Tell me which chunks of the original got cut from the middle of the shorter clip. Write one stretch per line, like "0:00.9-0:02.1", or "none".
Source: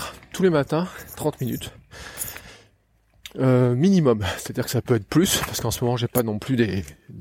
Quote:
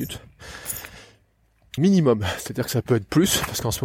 0:03.3-0:03.8